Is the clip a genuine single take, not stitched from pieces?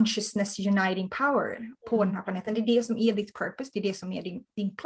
yes; 0 cuts

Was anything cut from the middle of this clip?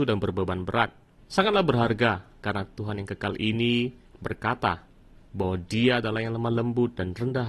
yes; 2 cuts; at 1.2 s, 4.1 s

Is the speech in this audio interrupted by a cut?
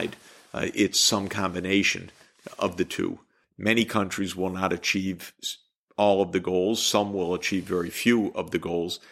yes; 1 cut; at 3.4 s

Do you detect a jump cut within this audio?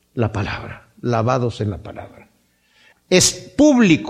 yes; 1 cut; at 2.9 s

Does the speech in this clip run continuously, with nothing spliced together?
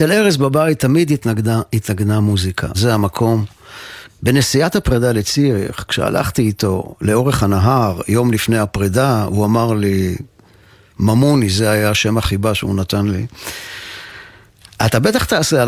no; 2 cuts; at 2.7 s, 4.1 s

